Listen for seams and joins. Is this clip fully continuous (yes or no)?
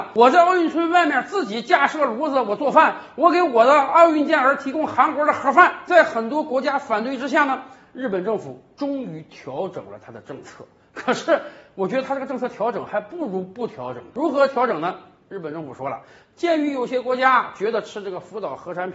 yes